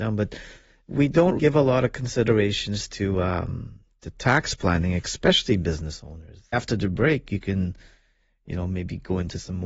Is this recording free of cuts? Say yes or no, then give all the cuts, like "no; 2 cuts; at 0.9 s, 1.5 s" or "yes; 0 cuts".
no; 2 cuts; at 1.4 s, 6.5 s